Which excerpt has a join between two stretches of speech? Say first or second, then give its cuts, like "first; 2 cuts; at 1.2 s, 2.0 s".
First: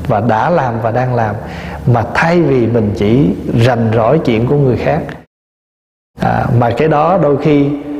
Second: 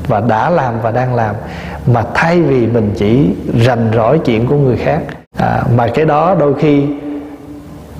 second; 1 cut; at 5.3 s